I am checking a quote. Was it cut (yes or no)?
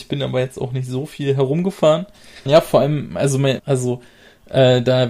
yes